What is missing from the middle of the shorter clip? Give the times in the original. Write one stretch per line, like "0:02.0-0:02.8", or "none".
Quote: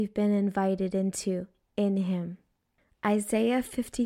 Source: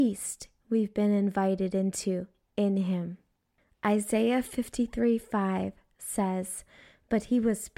none